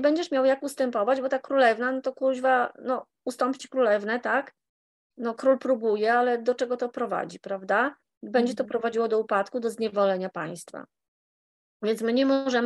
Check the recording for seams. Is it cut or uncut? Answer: uncut